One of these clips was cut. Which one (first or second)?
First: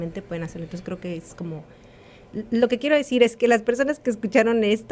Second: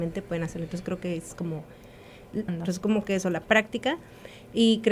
second